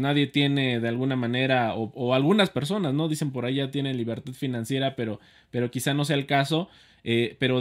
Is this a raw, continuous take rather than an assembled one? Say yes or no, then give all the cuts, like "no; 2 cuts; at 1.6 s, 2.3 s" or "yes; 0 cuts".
yes; 0 cuts